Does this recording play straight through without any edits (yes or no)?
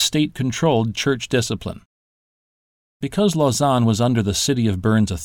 yes